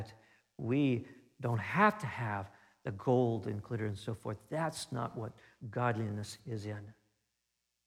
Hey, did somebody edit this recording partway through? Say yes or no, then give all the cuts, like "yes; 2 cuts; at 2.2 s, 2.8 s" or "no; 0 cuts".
no; 0 cuts